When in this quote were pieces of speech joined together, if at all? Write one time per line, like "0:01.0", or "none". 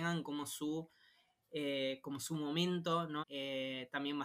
0:03.2